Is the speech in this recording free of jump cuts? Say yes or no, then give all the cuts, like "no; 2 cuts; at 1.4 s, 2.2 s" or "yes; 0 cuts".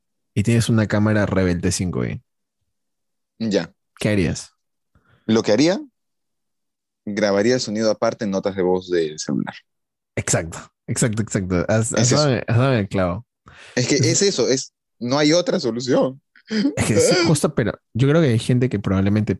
yes; 0 cuts